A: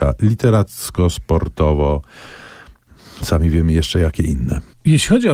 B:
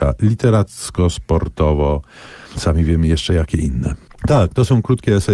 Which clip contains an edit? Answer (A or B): B